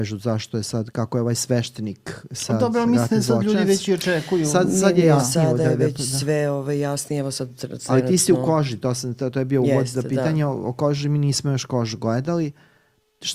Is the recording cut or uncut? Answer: uncut